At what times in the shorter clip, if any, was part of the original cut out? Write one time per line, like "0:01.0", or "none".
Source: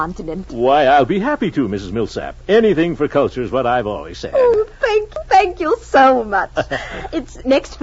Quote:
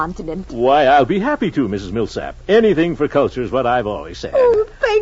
none